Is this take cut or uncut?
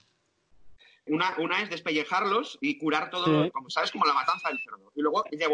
cut